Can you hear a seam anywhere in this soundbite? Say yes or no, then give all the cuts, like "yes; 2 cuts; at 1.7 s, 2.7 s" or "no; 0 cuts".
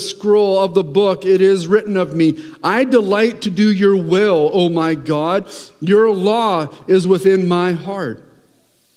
no; 0 cuts